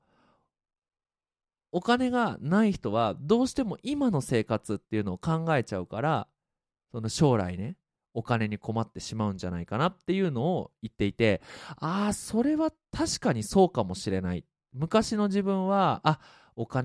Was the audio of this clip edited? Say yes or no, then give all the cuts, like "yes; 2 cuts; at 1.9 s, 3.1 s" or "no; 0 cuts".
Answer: no; 0 cuts